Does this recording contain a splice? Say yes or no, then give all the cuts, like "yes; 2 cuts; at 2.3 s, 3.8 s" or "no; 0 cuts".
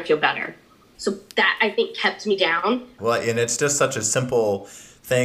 yes; 2 cuts; at 0.9 s, 3.0 s